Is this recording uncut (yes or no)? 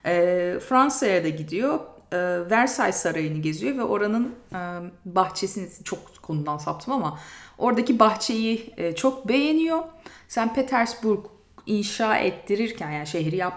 yes